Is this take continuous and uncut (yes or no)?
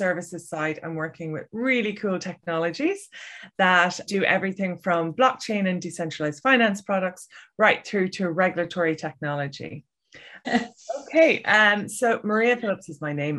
no